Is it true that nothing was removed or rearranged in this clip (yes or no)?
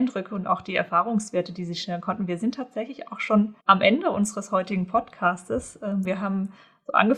no